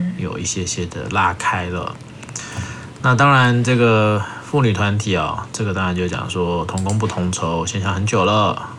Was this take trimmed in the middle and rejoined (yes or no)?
no